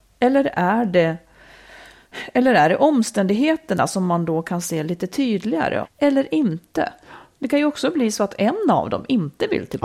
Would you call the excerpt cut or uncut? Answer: cut